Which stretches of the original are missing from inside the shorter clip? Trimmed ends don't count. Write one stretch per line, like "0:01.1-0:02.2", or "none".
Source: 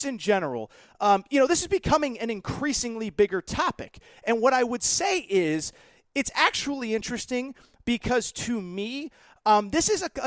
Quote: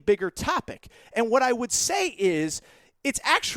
none